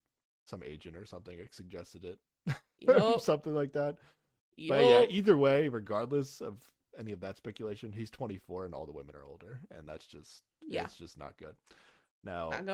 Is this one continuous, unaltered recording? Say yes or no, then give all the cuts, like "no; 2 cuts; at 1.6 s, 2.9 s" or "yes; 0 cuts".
yes; 0 cuts